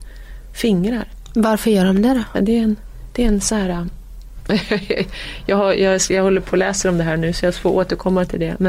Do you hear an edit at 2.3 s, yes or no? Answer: yes